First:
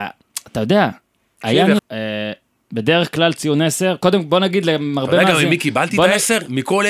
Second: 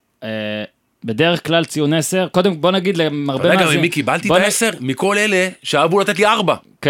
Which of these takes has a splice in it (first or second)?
first